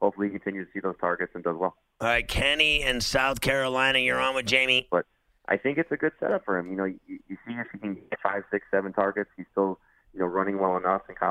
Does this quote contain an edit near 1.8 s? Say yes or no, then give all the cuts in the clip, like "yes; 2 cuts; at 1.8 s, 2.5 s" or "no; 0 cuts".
no; 1 cut; at 4.9 s